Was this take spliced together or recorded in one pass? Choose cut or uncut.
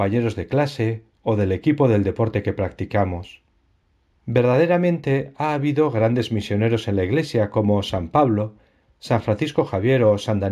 cut